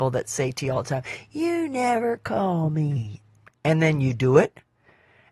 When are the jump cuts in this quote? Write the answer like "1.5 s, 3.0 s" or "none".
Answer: 3.5 s